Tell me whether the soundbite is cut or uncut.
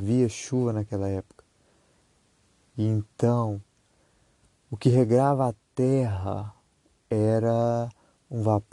uncut